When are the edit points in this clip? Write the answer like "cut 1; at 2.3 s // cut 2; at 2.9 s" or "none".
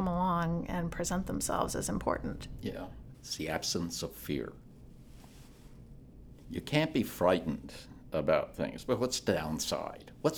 cut 1; at 3.1 s